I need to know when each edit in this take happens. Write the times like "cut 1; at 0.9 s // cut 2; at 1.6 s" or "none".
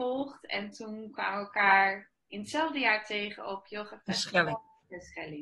none